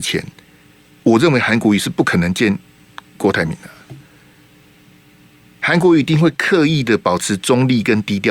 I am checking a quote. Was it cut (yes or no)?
no